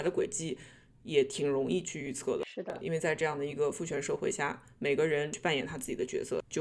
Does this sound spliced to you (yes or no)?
no